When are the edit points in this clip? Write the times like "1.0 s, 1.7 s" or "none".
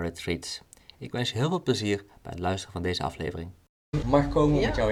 4.0 s